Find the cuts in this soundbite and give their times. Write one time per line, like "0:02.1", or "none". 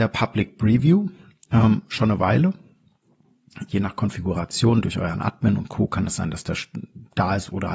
0:03.7